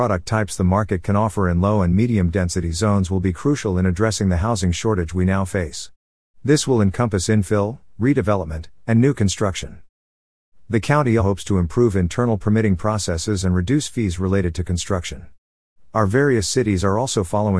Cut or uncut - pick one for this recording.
cut